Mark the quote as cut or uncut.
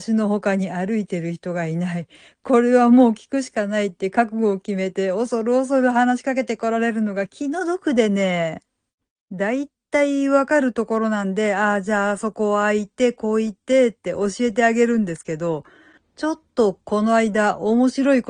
uncut